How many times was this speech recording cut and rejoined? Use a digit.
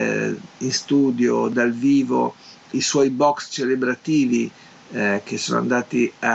1